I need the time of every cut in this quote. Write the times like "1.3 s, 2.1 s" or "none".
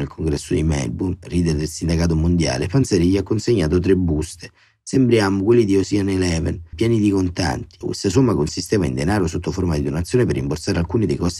6.7 s, 7.8 s